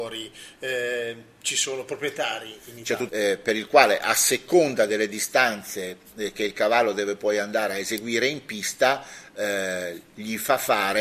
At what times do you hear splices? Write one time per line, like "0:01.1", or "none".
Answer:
0:03.1

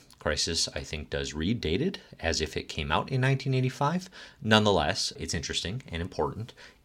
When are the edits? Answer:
0:05.2

